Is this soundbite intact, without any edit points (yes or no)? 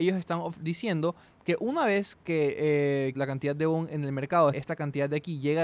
no